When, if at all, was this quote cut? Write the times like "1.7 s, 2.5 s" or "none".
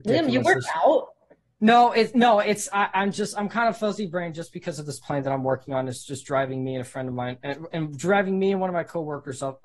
none